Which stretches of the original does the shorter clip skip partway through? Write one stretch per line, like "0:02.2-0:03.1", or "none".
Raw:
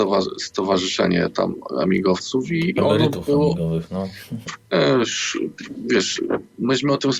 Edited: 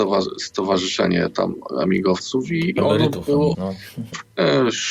0:03.5-0:03.9